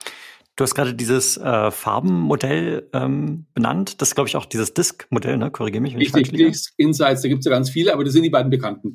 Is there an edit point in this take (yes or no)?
no